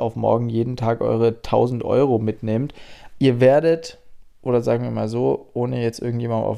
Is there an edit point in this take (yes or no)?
yes